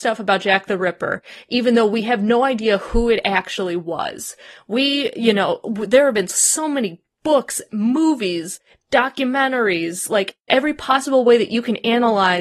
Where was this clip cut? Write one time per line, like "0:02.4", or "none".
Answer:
0:10.5